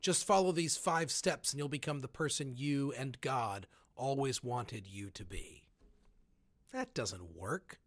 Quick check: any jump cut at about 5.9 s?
no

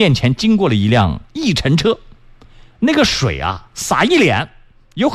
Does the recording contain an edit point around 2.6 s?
no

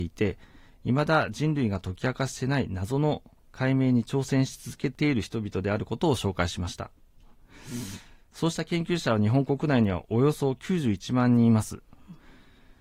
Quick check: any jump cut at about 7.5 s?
no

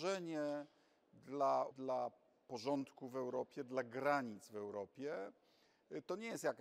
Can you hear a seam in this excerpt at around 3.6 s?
no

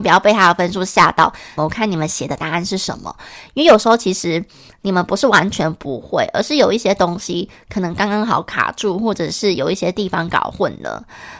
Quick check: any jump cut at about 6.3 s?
no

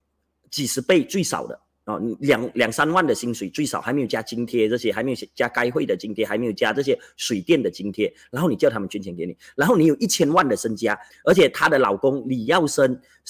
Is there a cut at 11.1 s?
yes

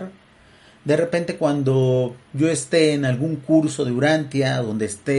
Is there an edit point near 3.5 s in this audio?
no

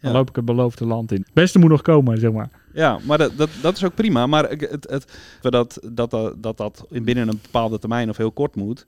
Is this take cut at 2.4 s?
no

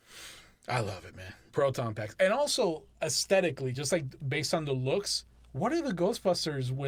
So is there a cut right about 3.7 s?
no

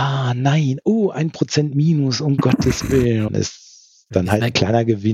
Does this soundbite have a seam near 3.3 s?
yes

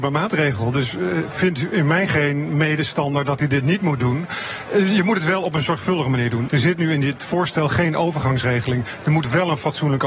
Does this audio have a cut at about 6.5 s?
yes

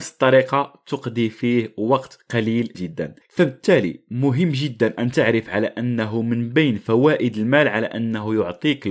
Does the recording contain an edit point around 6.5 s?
no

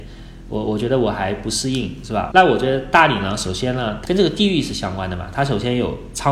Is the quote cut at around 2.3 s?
yes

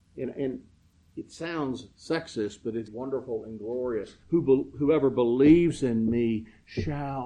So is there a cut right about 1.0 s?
no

